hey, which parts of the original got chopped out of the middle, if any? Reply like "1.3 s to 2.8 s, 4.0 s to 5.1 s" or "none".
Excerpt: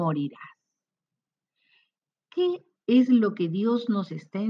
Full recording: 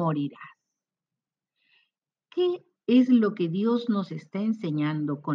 none